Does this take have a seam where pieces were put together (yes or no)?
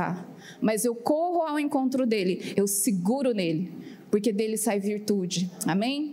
yes